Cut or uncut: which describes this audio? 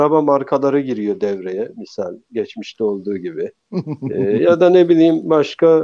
uncut